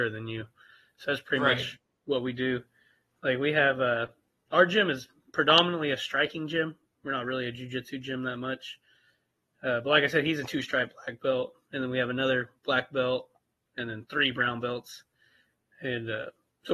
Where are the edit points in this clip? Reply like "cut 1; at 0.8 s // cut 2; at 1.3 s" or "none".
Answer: none